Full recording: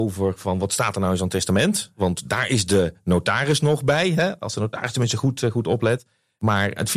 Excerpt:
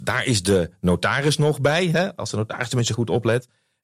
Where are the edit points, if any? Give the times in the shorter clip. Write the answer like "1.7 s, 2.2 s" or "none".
2.9 s